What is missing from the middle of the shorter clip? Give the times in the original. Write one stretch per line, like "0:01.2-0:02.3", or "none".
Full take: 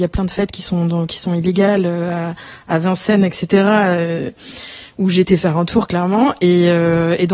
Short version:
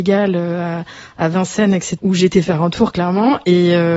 0:03.5-0:04.9